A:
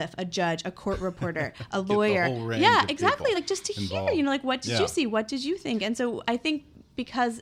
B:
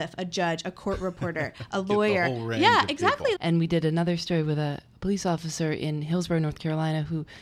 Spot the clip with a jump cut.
B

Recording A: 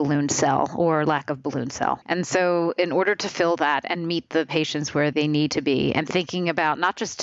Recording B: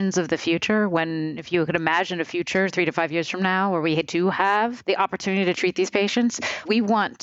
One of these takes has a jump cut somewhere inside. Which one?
A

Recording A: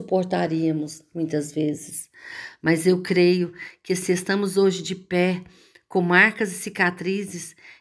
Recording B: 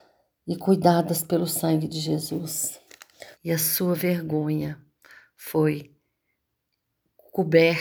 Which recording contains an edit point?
B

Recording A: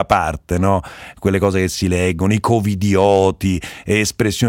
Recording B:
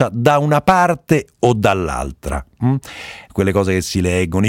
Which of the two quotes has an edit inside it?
B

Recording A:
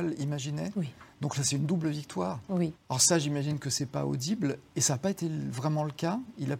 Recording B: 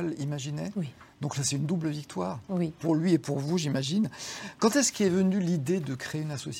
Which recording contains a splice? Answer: A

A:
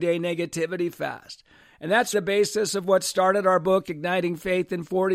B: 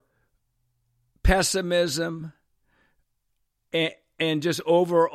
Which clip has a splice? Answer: A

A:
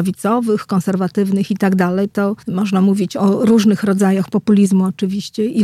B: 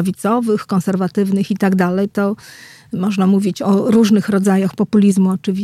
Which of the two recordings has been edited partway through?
A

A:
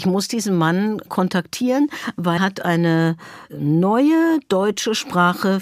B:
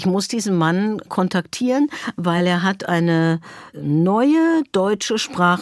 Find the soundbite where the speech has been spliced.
A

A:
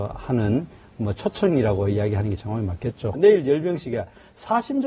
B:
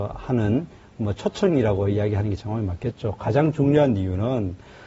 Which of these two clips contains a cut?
A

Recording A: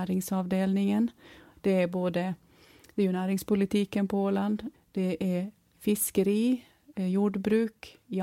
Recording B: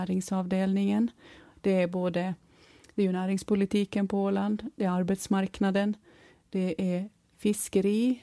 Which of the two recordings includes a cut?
A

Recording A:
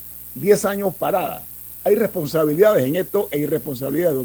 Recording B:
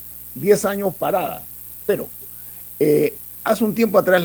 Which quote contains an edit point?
B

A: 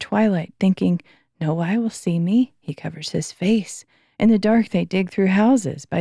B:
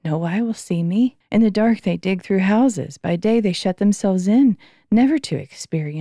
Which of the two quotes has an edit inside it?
B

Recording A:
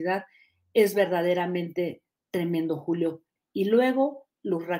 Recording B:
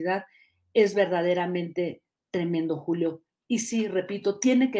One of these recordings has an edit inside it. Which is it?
A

